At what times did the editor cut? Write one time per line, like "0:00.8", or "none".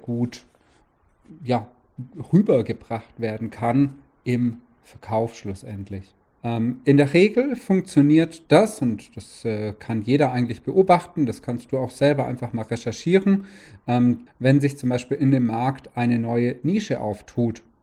0:06.4
0:14.3